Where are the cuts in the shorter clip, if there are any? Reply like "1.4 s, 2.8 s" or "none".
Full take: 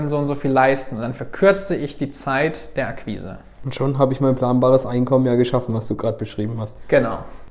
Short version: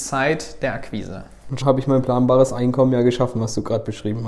1.6 s